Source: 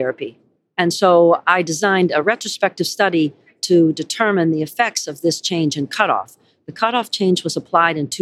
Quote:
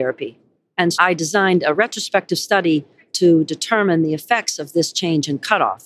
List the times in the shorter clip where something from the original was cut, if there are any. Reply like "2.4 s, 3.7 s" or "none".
0.9 s